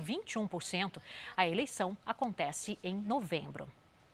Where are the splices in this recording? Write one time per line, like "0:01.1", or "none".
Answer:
0:01.4